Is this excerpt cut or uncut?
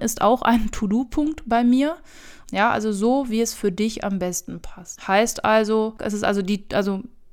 cut